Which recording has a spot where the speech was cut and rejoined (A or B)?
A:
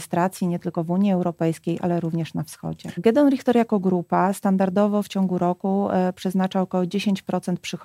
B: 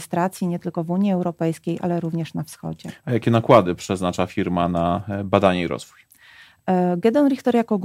A